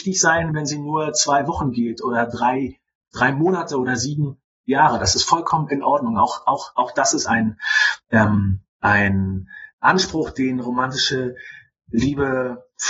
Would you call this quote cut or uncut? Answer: uncut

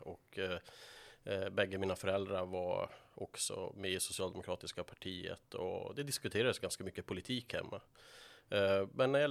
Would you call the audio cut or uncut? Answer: uncut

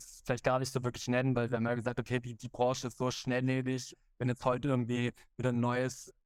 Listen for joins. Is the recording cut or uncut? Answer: uncut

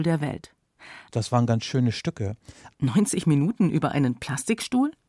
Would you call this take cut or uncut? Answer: cut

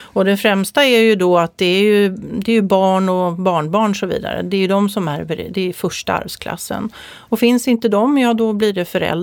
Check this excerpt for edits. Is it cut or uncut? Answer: uncut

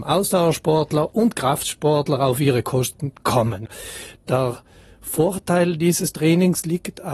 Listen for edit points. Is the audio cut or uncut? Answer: uncut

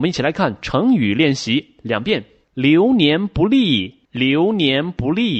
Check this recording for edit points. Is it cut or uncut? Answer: cut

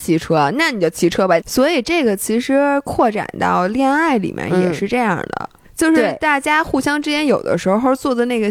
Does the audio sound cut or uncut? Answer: cut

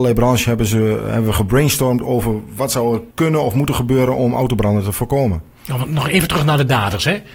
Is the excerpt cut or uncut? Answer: cut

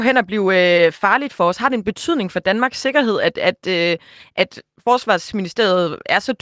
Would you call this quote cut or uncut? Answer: uncut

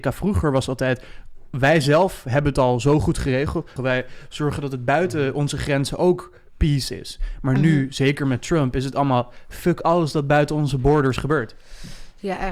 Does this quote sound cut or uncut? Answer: cut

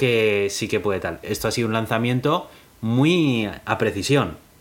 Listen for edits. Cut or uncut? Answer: cut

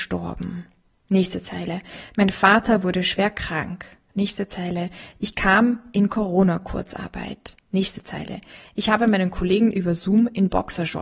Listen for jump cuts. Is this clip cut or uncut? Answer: uncut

